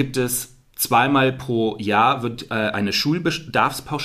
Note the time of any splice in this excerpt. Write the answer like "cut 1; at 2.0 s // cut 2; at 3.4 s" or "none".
none